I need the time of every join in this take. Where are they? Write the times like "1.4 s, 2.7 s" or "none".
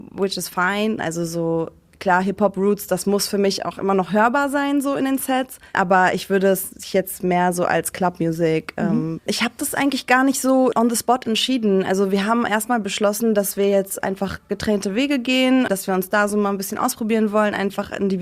1.0 s, 9.2 s